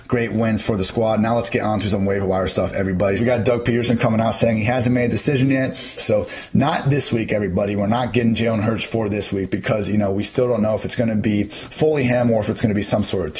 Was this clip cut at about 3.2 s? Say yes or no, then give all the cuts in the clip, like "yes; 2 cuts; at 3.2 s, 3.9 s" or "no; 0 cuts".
yes; 2 cuts; at 3.2 s, 6.0 s